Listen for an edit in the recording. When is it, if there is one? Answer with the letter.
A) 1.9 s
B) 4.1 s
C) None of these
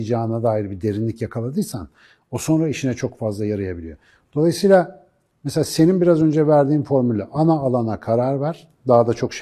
C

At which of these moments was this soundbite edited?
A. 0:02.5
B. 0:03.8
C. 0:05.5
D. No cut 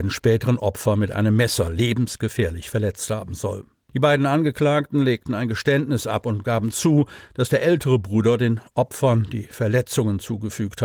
D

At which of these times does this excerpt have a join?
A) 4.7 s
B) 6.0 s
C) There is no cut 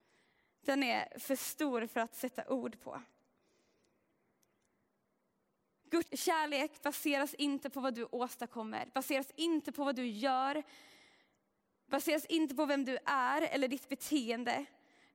B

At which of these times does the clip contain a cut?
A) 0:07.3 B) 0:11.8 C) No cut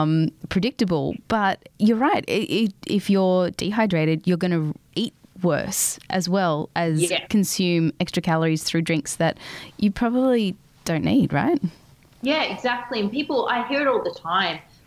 C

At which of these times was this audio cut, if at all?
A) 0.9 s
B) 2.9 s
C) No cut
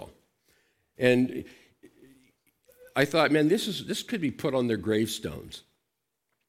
A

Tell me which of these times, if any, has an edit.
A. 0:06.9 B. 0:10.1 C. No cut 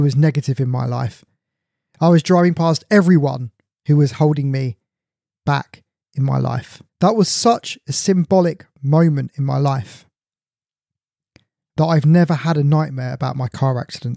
A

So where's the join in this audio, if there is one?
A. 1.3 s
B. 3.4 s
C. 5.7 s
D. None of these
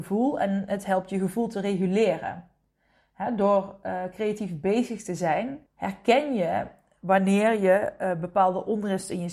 C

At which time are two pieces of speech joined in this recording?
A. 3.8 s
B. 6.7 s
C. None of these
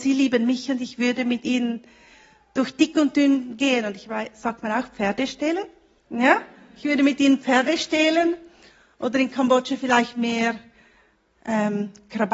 C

